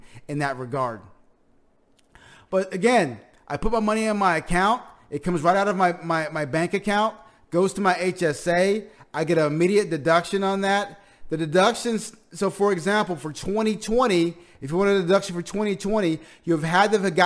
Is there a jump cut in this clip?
no; 0 cuts

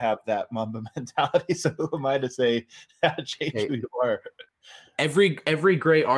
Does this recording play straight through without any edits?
yes; 0 cuts

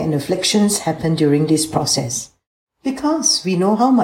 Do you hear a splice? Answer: yes; 1 cut; at 2.7 s

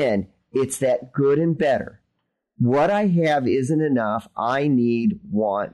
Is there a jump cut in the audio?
no; 0 cuts

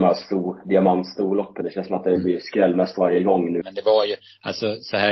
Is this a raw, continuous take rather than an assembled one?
no; 2 cuts; at 1.6 s, 3.6 s

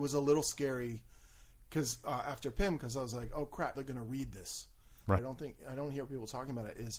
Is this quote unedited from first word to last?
no; 2 cuts; at 3.7 s, 5.2 s

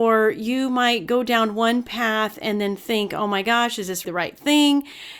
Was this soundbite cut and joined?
yes; 1 cut; at 4.0 s

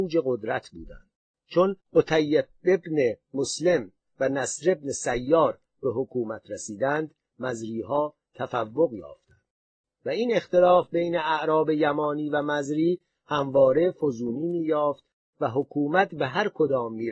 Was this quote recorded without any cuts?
no; 1 cut; at 1.8 s

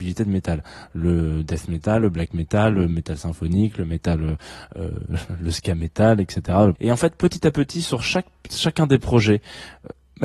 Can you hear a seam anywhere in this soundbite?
yes; 1 cut; at 6.8 s

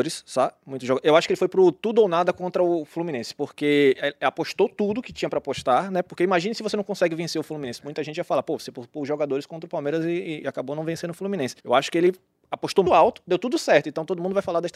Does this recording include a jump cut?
yes; 2 cuts; at 11.6 s, 12.9 s

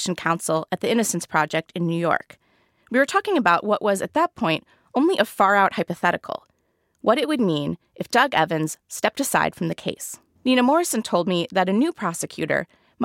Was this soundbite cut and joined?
yes; 1 cut; at 10.3 s

